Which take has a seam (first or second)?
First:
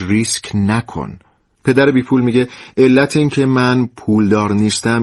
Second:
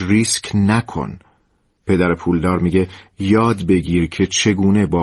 first